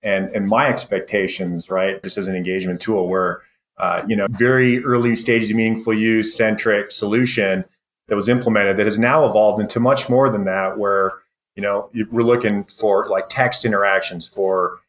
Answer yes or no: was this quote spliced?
yes